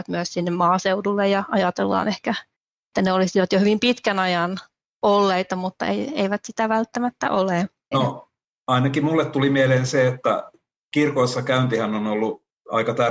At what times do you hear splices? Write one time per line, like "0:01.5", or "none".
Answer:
0:07.9